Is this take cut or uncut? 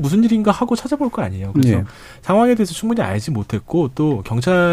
cut